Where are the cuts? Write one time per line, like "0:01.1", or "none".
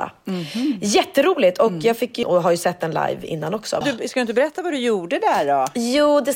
0:02.2
0:03.8